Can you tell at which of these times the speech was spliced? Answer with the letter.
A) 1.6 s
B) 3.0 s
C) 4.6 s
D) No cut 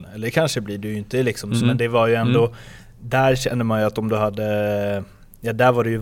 A